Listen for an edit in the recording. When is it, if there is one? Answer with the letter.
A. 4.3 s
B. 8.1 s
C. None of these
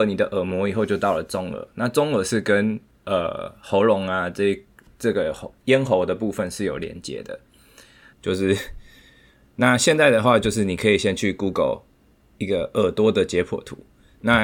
B